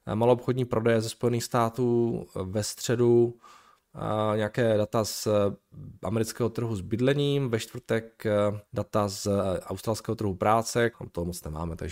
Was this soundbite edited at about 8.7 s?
yes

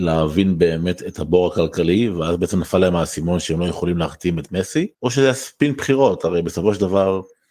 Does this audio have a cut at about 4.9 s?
yes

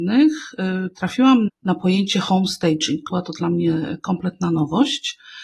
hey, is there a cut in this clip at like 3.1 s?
yes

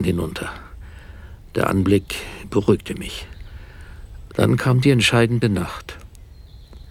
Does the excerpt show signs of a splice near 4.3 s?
yes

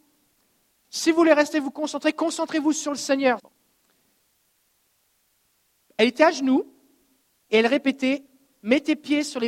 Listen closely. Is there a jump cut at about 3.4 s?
yes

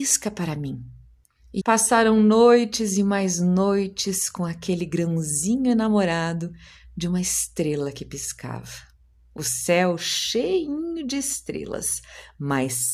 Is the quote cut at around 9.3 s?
no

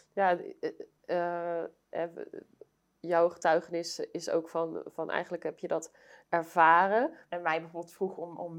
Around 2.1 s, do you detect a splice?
no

